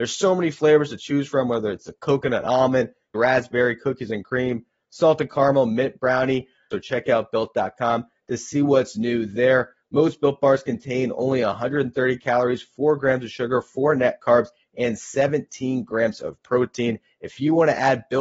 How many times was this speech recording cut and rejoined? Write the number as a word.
two